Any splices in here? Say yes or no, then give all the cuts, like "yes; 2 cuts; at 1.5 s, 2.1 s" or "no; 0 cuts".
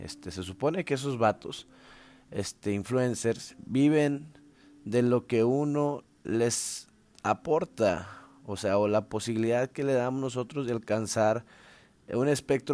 no; 0 cuts